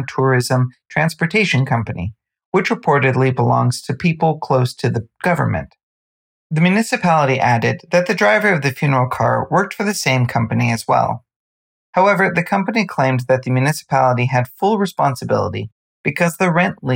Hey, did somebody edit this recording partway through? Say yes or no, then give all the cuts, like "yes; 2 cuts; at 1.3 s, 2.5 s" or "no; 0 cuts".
no; 0 cuts